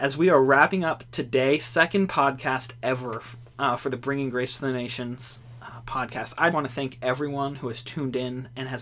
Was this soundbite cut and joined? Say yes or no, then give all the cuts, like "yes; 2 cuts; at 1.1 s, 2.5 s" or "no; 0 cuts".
yes; 1 cut; at 6.5 s